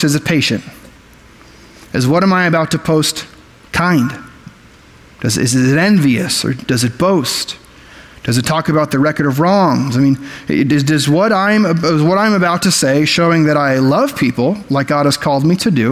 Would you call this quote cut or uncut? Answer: uncut